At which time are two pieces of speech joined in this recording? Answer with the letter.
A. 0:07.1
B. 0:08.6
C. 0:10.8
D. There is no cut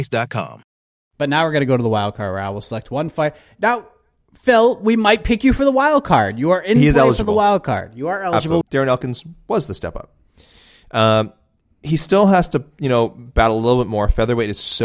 B